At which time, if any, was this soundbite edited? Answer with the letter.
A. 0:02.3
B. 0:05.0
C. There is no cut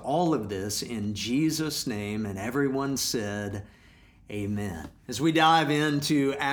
B